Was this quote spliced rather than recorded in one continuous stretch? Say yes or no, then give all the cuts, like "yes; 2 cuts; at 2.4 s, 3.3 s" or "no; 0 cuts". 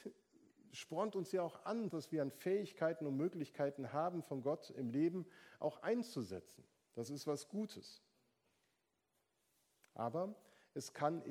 yes; 1 cut; at 1.9 s